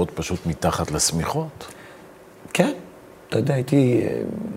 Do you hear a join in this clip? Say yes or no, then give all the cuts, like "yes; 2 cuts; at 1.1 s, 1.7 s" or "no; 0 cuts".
no; 0 cuts